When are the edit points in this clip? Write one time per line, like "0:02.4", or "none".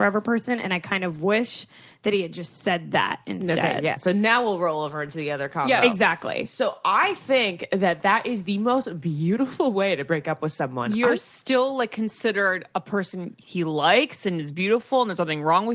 none